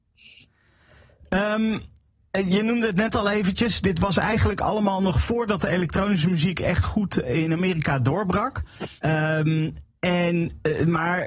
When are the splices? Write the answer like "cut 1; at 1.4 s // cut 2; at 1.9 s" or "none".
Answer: cut 1; at 9.0 s

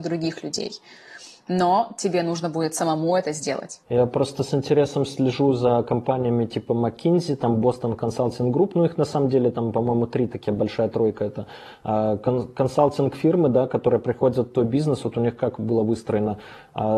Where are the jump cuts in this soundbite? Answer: cut 1; at 3.8 s

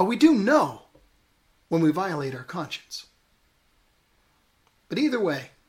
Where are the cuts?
none

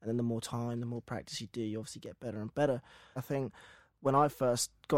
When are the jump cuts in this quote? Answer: cut 1; at 3.2 s

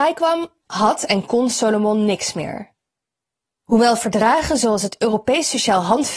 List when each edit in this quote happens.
cut 1; at 3.5 s

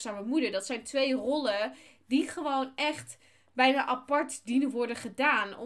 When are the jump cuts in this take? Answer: none

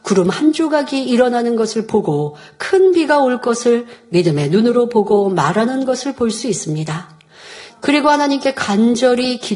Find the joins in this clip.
cut 1; at 7.7 s

